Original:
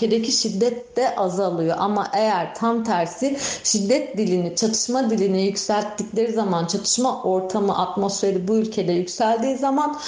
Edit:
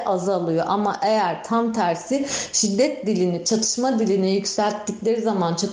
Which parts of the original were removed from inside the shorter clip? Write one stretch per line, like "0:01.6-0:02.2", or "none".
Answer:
none